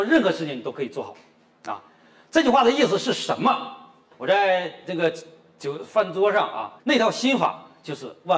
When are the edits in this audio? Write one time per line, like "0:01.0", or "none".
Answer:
0:04.1
0:06.8